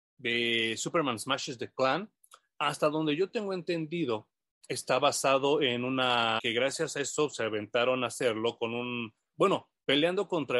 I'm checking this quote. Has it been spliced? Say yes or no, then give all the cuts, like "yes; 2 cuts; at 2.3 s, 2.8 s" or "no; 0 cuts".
yes; 2 cuts; at 6.4 s, 9.3 s